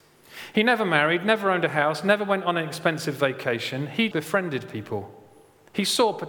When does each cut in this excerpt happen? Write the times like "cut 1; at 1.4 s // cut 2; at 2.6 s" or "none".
cut 1; at 4.1 s